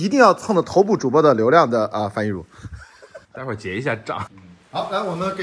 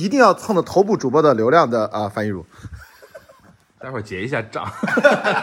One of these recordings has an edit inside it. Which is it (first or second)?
first